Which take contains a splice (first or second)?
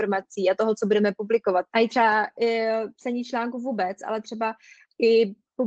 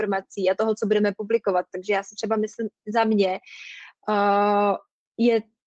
first